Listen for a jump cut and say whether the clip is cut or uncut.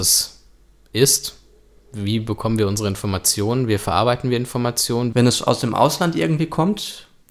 cut